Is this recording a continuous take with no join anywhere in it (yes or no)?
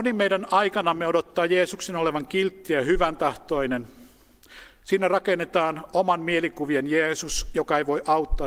yes